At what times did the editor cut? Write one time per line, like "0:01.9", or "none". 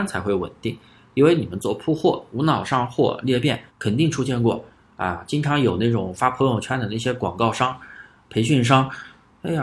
0:03.7